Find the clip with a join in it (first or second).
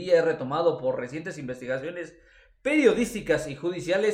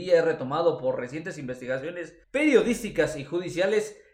second